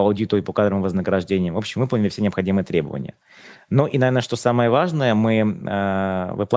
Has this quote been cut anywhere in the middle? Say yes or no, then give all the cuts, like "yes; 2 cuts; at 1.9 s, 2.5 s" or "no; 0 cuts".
no; 0 cuts